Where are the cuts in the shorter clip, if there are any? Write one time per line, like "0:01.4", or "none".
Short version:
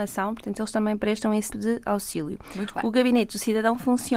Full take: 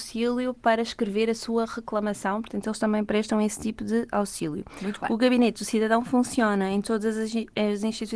0:01.5